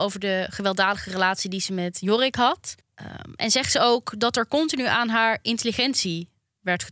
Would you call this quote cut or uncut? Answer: uncut